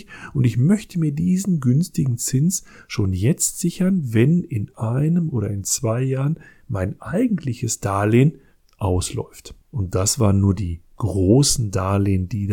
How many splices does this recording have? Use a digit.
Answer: 1